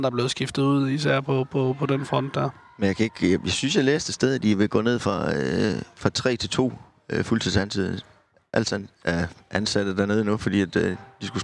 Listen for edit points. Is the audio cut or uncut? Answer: uncut